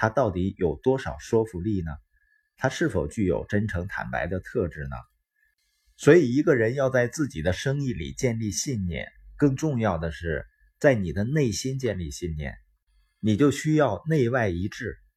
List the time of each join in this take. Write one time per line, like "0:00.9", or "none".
none

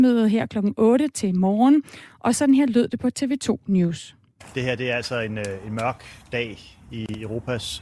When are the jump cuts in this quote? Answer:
none

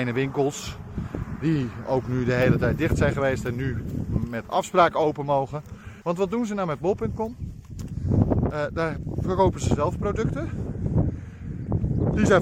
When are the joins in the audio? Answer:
0:06.0
0:08.5

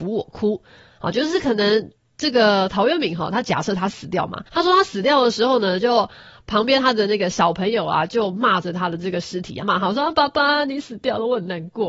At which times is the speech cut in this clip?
0:04.5
0:09.6

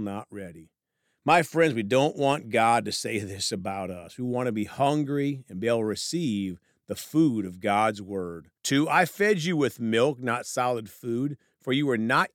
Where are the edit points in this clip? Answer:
0:08.6

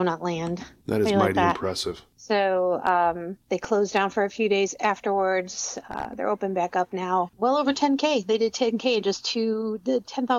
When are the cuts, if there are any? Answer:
0:07.3

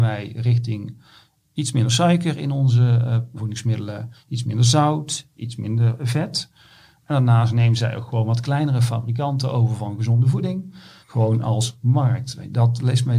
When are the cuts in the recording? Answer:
0:03.4
0:07.0
0:11.0

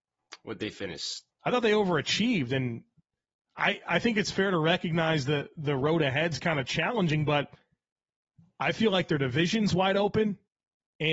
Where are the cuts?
0:01.3

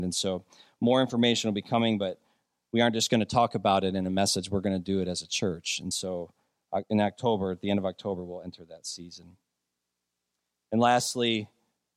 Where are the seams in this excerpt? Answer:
none

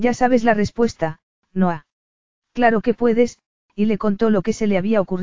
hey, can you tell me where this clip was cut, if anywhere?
0:02.4

